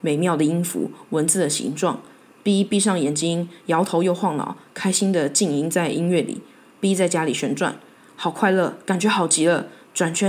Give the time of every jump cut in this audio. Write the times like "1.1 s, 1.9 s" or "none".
none